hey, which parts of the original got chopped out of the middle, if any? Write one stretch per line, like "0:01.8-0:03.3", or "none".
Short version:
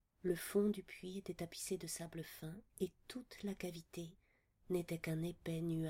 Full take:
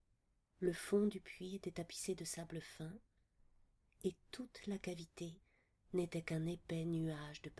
0:03.1-0:03.9